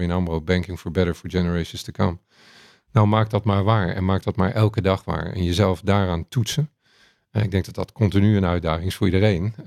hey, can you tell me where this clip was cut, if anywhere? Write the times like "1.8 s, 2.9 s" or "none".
none